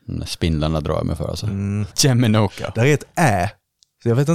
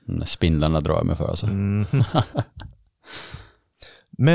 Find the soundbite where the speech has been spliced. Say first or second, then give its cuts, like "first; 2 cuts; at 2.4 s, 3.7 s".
first; 1 cut; at 1.9 s